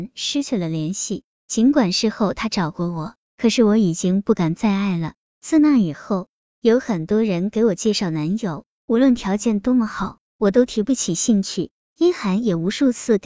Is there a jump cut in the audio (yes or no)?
no